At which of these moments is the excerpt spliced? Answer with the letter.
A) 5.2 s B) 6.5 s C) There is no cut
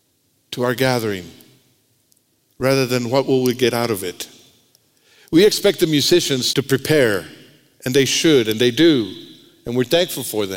B